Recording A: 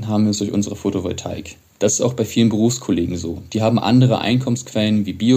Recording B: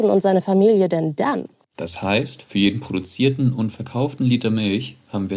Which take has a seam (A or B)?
B